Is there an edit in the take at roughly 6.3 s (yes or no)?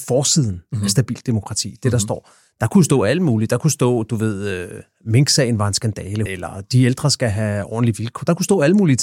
yes